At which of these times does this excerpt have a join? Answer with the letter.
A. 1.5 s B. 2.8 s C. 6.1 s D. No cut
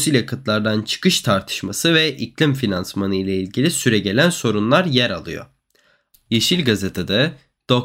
C